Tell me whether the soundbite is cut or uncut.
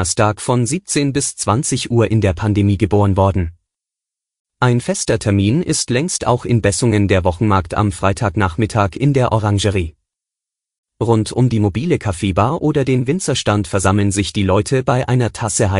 uncut